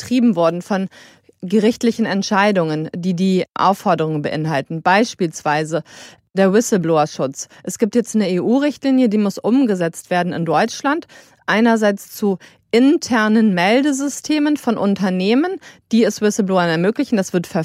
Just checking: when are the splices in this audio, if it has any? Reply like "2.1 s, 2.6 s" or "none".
none